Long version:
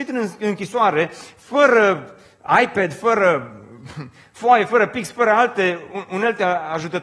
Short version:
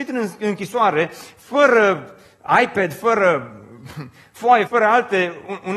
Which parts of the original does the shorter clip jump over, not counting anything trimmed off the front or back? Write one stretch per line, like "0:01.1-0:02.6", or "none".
0:04.7-0:05.1